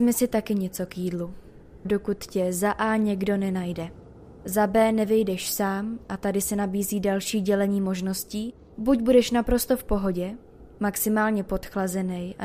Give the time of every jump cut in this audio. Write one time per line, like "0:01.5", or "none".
0:01.8